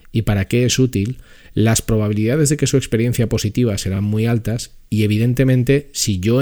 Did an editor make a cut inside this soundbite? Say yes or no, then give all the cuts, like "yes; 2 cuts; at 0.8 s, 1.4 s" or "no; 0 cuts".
no; 0 cuts